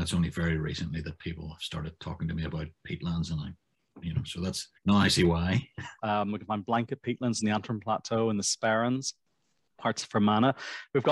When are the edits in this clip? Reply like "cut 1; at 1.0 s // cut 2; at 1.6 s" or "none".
cut 1; at 4.8 s // cut 2; at 6.0 s